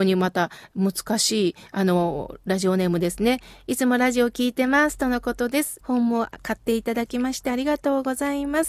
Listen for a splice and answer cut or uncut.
cut